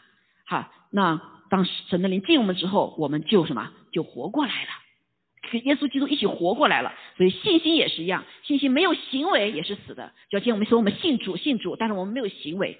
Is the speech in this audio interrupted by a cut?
no; 0 cuts

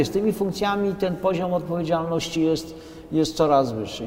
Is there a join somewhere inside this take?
no; 0 cuts

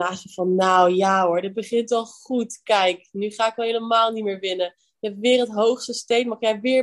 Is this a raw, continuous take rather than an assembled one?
yes; 0 cuts

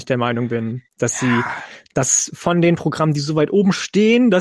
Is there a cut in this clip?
no; 0 cuts

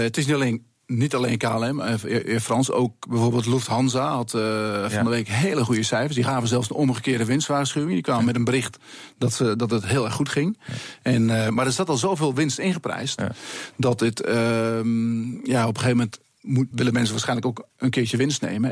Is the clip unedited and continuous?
no; 1 cut; at 16.7 s

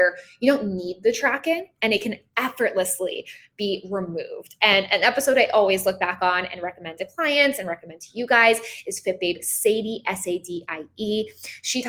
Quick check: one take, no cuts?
yes; 0 cuts

